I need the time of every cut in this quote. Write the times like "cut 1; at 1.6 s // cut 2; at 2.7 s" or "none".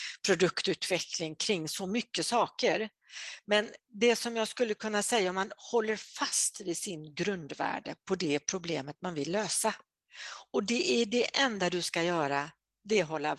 none